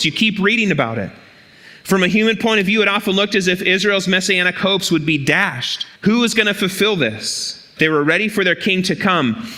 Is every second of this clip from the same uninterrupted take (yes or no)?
no